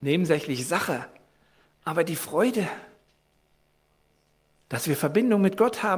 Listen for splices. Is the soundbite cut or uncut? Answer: uncut